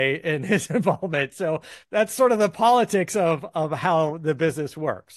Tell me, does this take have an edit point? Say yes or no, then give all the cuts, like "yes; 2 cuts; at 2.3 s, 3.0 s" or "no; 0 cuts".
yes; 1 cut; at 1.8 s